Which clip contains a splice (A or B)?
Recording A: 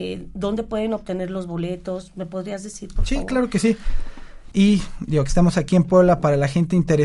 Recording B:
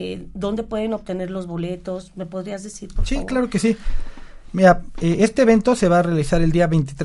A